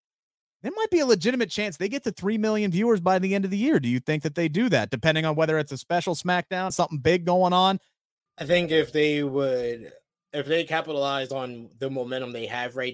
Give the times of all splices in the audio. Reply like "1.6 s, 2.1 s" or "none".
6.7 s, 8.3 s